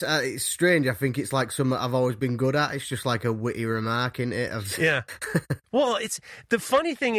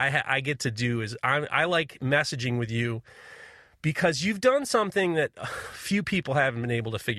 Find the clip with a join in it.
first; 1 cut; at 5.7 s

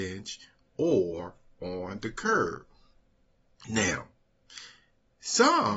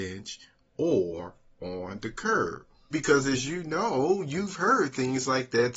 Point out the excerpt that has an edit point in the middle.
second; 1 cut; at 2.9 s

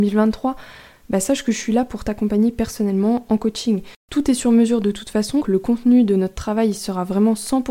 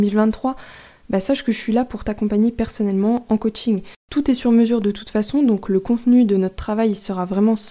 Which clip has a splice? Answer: first; 1 cut; at 5.4 s

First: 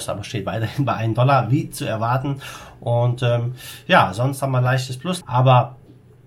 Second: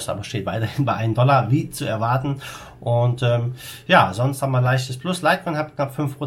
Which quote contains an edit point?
first; 1 cut; at 5.2 s

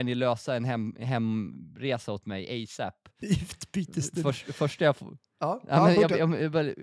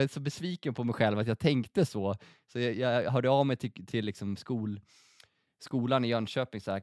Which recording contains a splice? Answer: first; 1 cut; at 3.2 s

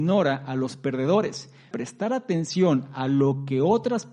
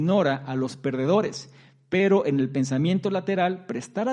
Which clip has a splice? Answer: first; 1 cut; at 1.7 s

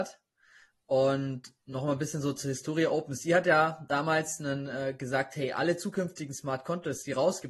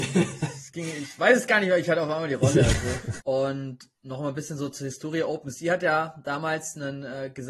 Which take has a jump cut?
second; 1 cut; at 3.2 s

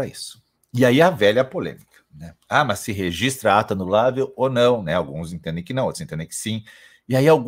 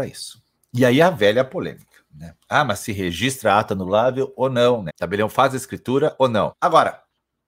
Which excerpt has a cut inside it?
second; 2 cuts; at 4.9 s, 6.5 s

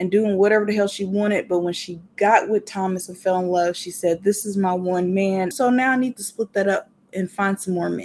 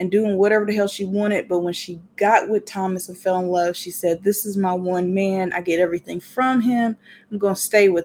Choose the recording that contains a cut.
first; 1 cut; at 5.5 s

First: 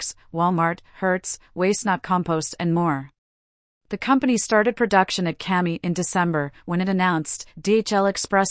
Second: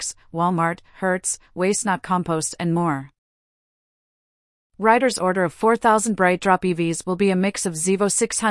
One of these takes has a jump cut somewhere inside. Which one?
first; 1 cut; at 3.8 s

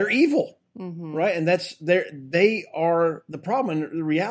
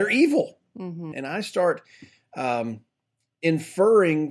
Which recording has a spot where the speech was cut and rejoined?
second; 1 cut; at 1.1 s

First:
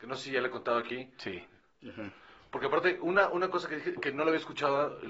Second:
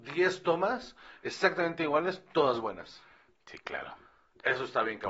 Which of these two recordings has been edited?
first; 1 cut; at 1.6 s

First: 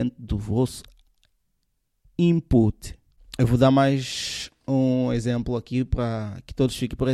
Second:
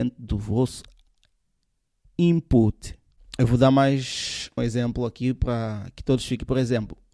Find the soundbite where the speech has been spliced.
second; 1 cut; at 4.6 s

